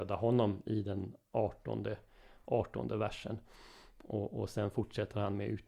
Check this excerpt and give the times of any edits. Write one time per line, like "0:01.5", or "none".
none